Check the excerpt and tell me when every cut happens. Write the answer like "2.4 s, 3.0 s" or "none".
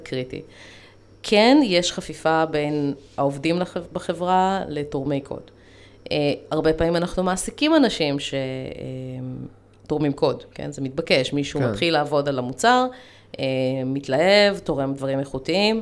none